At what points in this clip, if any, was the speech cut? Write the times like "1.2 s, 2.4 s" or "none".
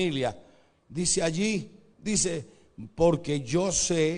1.9 s